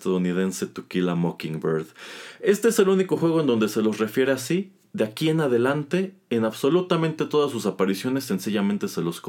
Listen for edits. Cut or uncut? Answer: uncut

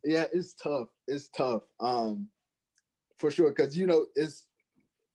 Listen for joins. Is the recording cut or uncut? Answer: uncut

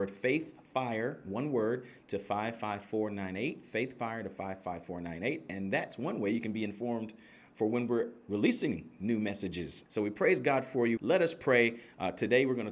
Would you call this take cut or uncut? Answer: cut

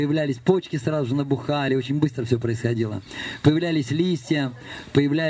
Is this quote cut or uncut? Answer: uncut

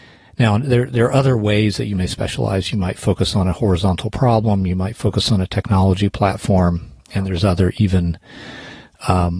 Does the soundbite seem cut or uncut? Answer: uncut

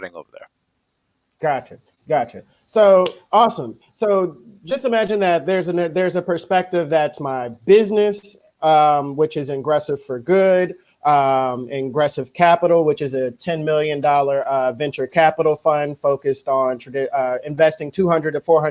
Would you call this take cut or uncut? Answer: uncut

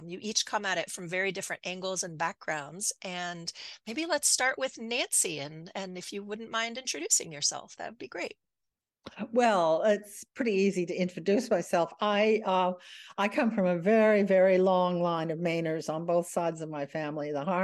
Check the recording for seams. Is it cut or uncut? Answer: uncut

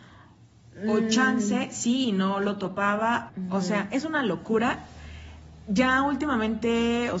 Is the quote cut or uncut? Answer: cut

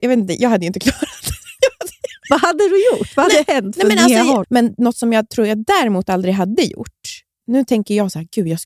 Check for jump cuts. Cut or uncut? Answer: cut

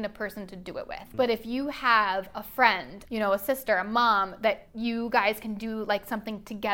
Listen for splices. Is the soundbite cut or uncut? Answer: cut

